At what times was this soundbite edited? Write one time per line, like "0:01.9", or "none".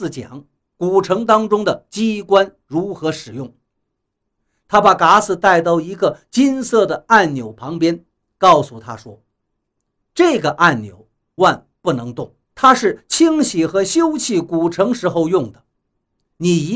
0:11.4
0:12.5